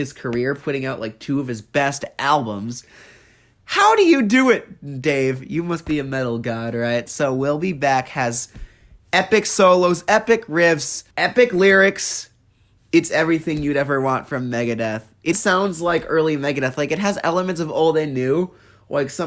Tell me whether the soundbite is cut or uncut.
cut